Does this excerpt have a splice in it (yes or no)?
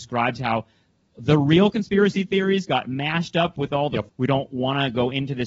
yes